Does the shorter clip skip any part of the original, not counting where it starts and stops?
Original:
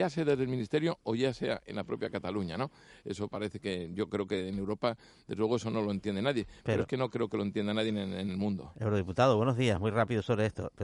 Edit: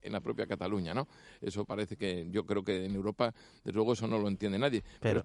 no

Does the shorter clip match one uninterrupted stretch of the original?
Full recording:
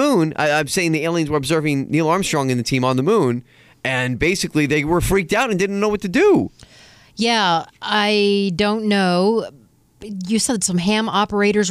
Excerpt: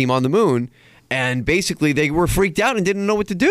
yes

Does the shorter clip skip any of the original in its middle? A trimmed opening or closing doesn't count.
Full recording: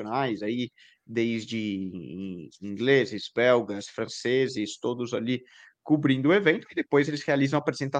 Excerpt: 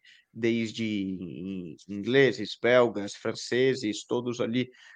no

